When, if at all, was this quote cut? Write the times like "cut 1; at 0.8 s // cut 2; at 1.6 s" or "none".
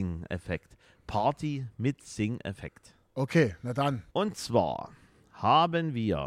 cut 1; at 4.1 s